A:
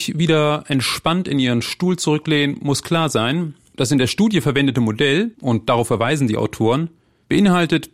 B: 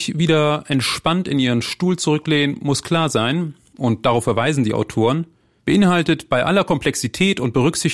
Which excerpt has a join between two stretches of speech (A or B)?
B